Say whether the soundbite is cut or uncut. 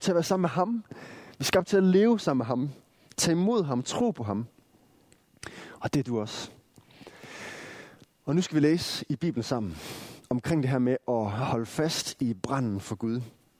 uncut